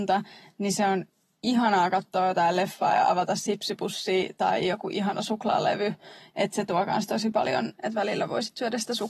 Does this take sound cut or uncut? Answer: cut